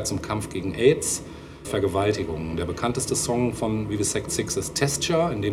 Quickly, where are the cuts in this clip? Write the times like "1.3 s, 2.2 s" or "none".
1.6 s